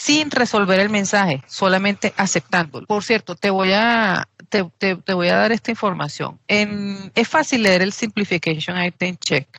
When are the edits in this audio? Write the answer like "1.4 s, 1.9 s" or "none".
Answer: none